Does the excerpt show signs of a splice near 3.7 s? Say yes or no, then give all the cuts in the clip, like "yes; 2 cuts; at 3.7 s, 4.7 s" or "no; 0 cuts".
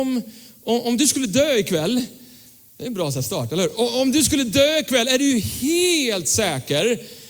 no; 0 cuts